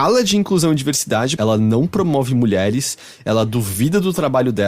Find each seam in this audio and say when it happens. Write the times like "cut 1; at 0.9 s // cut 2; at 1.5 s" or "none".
cut 1; at 1.4 s